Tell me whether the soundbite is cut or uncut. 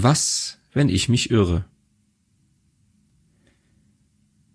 uncut